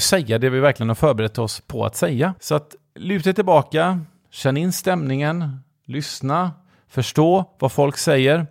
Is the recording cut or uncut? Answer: uncut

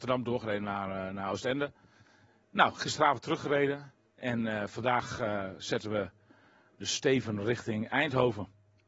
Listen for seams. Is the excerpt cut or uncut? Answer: uncut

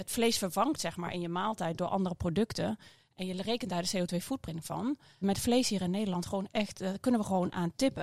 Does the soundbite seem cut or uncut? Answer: cut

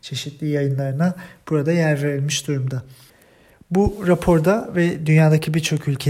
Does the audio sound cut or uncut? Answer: uncut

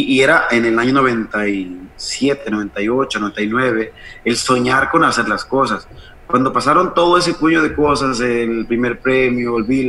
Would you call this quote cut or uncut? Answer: uncut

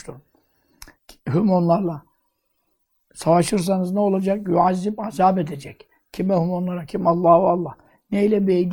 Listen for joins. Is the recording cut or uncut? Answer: uncut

